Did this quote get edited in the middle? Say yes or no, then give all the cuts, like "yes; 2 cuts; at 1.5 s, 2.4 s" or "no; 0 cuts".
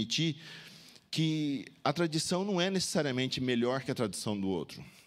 no; 0 cuts